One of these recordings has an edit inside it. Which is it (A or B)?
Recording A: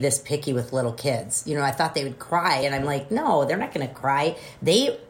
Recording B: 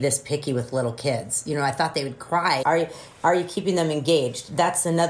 B